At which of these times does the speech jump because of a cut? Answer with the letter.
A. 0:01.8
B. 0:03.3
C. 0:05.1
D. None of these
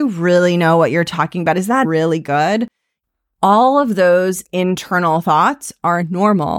A